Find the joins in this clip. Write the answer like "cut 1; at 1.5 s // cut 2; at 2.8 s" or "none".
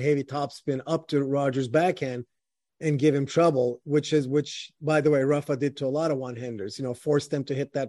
none